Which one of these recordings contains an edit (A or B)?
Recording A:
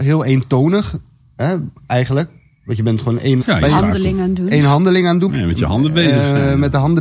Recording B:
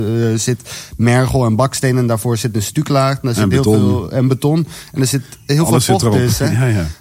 A